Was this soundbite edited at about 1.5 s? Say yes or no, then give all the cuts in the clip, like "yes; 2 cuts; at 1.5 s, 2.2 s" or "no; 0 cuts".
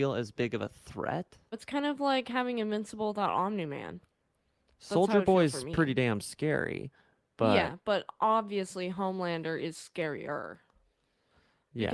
yes; 1 cut; at 1.5 s